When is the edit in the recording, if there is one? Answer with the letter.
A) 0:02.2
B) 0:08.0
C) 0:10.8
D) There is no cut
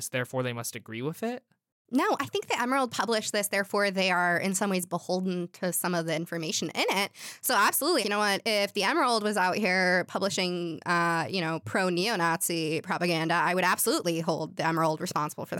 B